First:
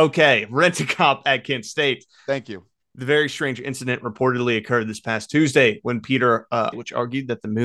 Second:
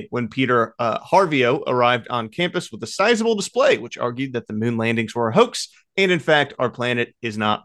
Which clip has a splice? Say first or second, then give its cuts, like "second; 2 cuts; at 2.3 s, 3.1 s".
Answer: first; 1 cut; at 6.7 s